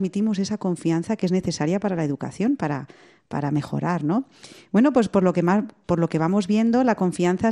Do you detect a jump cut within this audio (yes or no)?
no